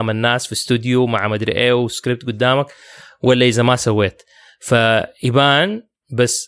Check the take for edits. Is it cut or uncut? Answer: uncut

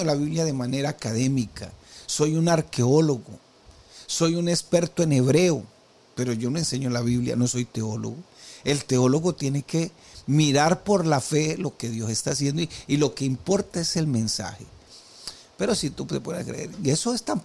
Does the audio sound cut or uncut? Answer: uncut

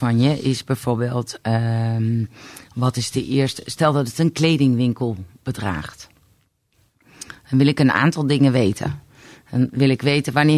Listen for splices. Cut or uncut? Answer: uncut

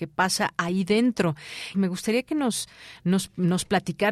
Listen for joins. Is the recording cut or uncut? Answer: cut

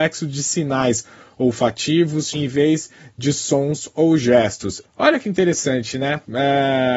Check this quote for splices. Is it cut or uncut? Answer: cut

